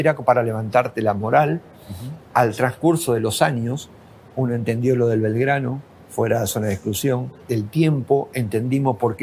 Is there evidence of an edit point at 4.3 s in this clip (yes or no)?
no